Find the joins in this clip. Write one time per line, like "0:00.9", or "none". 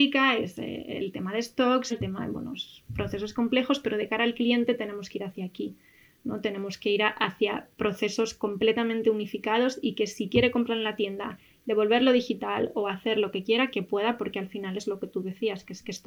0:01.9
0:13.7